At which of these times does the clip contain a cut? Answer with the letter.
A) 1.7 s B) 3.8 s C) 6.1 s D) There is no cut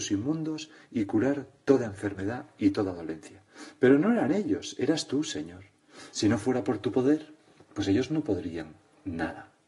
D